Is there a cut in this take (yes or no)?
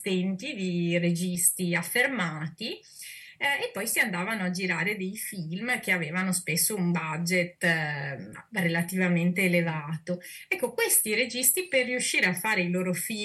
no